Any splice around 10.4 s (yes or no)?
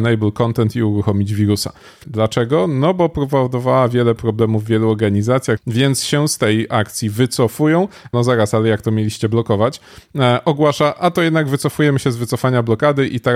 no